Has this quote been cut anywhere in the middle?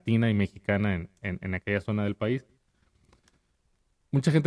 no; 0 cuts

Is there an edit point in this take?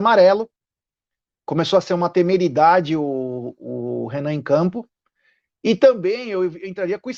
no; 0 cuts

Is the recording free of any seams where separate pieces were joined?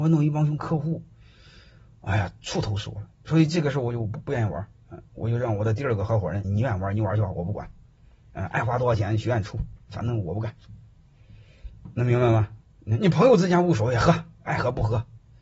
no; 2 cuts; at 6.4 s, 12.6 s

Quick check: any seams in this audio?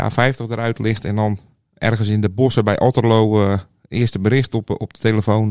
no; 0 cuts

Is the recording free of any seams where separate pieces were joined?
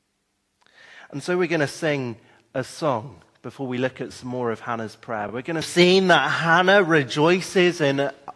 yes; 0 cuts

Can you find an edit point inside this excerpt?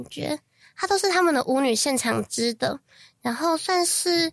no; 0 cuts

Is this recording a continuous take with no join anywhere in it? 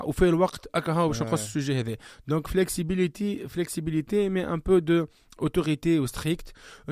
yes; 0 cuts

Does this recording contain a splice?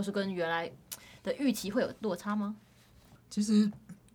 yes; 1 cut; at 3.2 s

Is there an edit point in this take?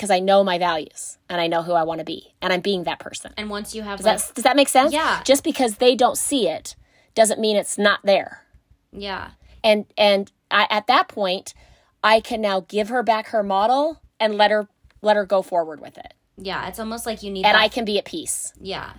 no; 0 cuts

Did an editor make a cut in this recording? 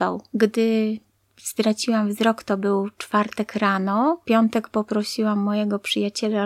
no; 0 cuts

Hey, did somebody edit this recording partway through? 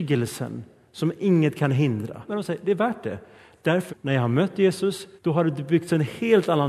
yes; 3 cuts; at 2.3 s, 3.9 s, 5.2 s

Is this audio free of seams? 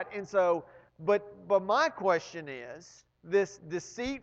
no; 1 cut; at 3.1 s

